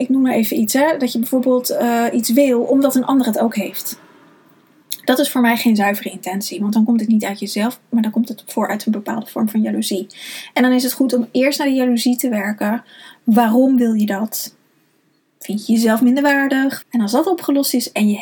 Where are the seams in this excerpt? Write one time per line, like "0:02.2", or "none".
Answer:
0:16.8